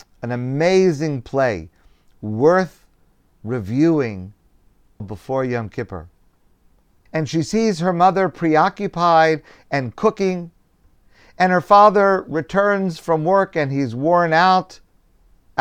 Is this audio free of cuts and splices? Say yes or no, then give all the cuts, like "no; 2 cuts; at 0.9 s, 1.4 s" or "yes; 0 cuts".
no; 2 cuts; at 5.0 s, 7.1 s